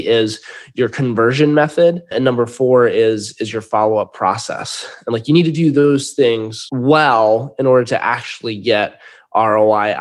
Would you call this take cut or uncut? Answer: uncut